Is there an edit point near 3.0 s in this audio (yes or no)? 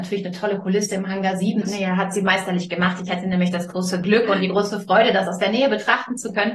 no